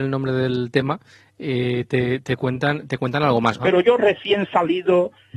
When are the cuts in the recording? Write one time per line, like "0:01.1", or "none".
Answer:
0:03.6